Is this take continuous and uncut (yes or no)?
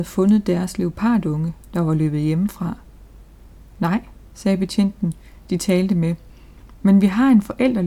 yes